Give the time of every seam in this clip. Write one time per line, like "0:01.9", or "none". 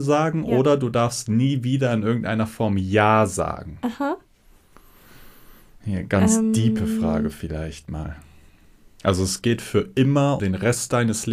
0:09.0
0:10.4